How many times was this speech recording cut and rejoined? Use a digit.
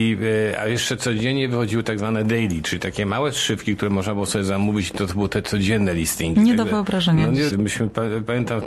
1